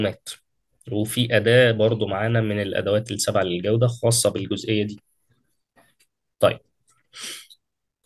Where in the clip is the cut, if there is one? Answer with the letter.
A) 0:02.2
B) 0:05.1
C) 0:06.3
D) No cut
D